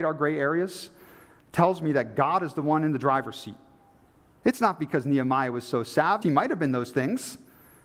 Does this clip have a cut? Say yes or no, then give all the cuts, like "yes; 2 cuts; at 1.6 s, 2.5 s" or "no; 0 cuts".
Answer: yes; 2 cuts; at 4.4 s, 6.2 s